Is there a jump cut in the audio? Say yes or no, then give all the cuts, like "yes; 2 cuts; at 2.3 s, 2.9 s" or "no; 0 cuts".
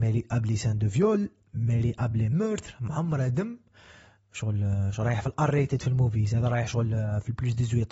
no; 0 cuts